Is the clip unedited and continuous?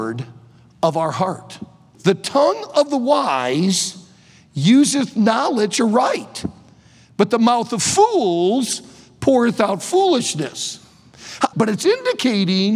no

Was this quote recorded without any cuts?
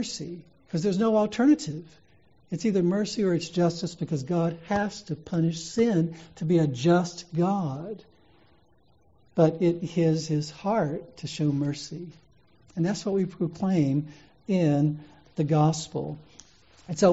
yes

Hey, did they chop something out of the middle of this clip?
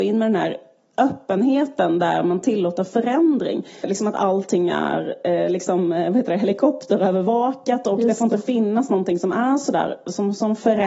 yes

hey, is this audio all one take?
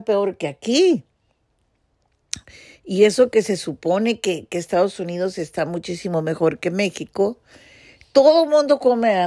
yes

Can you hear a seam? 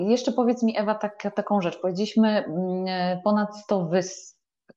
no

